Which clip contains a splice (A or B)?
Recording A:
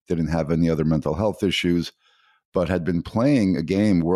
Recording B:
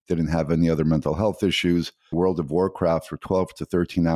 B